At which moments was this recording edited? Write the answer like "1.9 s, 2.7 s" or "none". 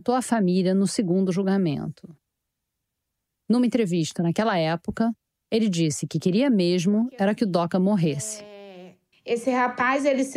9.1 s